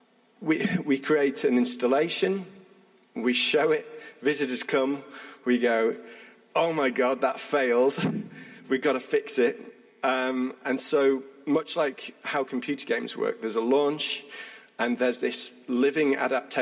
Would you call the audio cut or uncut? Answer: cut